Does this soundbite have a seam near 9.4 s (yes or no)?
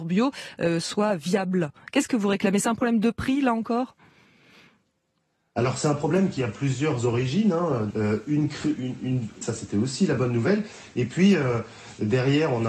yes